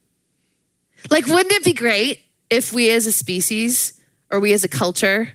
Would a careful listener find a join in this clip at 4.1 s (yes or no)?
no